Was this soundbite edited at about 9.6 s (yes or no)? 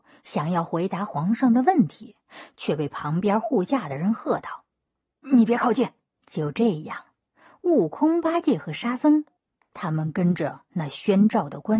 no